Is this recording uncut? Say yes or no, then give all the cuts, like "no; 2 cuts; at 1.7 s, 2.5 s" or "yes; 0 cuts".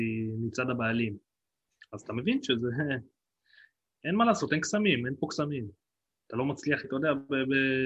no; 1 cut; at 6.8 s